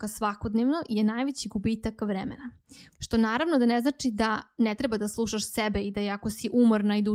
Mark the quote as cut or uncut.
cut